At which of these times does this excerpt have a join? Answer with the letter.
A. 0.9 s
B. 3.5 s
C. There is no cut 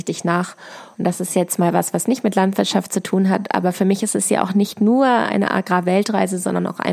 A